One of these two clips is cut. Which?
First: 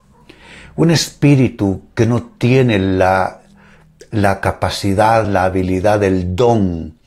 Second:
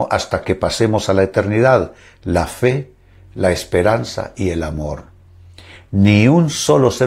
first; 1 cut; at 5.2 s

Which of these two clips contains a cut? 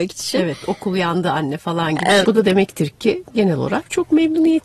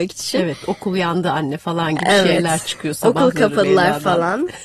first; 1 cut; at 2.2 s

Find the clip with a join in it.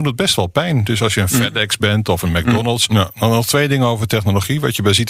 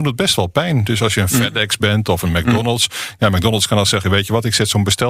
first; 1 cut; at 2.9 s

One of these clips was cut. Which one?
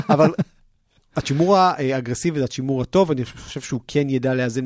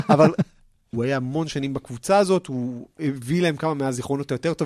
second; 1 cut; at 0.9 s

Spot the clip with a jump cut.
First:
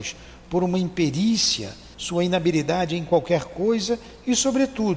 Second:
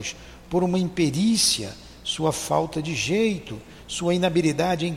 first; 1 cut; at 1.9 s

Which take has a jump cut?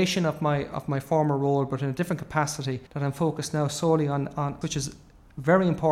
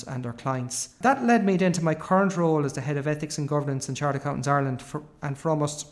first; 2 cuts; at 2.9 s, 4.6 s

